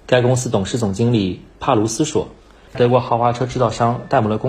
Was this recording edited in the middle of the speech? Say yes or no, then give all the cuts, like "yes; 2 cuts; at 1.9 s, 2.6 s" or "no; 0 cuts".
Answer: yes; 1 cut; at 2.7 s